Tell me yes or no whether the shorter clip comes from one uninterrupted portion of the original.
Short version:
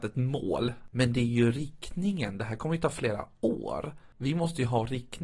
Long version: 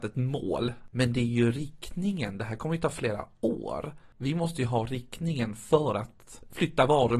yes